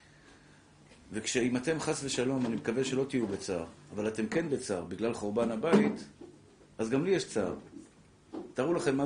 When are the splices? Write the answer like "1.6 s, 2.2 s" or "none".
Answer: none